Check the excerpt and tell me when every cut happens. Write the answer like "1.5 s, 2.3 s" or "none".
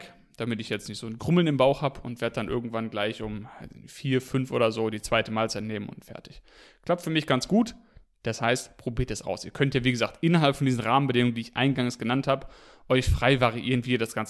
9.2 s